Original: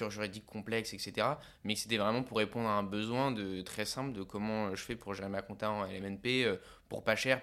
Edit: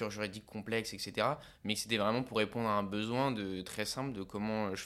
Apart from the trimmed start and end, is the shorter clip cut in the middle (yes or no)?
no